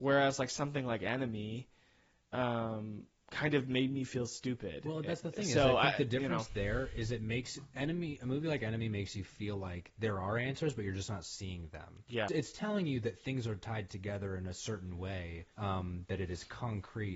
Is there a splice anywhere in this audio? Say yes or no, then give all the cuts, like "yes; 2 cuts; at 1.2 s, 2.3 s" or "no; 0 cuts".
yes; 2 cuts; at 12.3 s, 15.5 s